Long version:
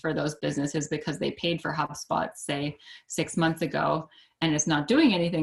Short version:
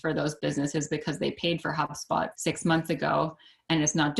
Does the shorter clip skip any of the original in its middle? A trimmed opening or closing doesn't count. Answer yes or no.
yes